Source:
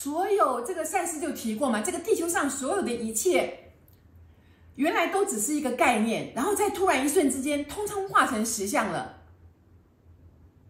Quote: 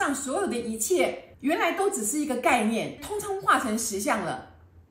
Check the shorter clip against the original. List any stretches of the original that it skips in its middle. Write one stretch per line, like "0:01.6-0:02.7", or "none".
0:03.7-0:04.7
0:06.3-0:07.6